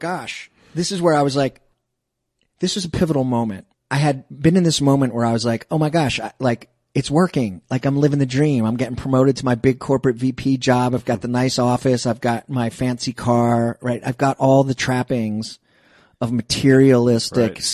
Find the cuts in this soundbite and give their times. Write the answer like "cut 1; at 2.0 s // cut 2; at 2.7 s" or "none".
none

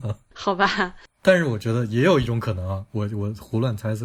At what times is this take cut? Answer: none

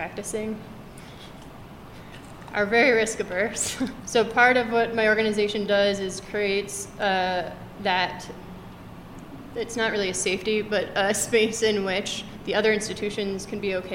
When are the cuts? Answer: cut 1; at 4.0 s

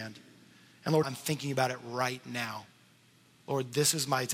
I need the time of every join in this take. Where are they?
cut 1; at 1.0 s

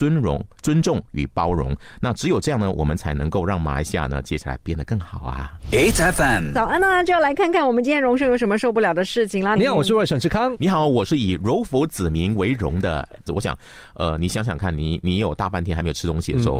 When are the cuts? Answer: cut 1; at 9.6 s // cut 2; at 13.3 s

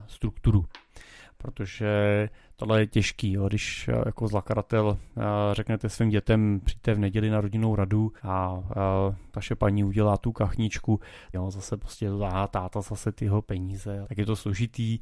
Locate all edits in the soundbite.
cut 1; at 8.2 s // cut 2; at 11.3 s // cut 3; at 14.0 s

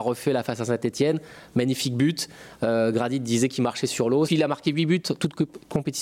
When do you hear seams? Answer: cut 1; at 4.3 s

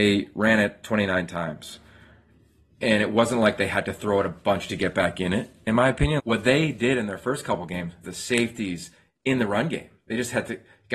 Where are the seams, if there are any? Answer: cut 1; at 6.2 s // cut 2; at 8.0 s

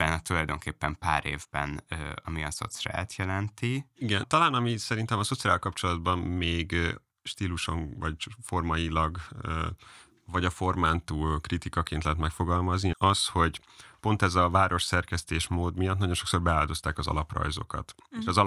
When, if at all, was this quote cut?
cut 1; at 4.2 s // cut 2; at 12.9 s

